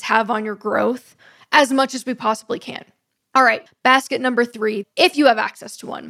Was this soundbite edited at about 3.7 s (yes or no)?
yes